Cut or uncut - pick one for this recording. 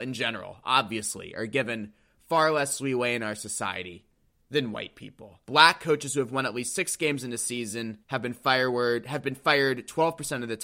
cut